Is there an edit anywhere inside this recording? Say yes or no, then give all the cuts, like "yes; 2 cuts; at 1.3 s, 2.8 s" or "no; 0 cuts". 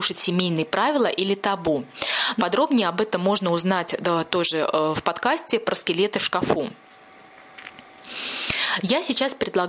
yes; 1 cut; at 2.4 s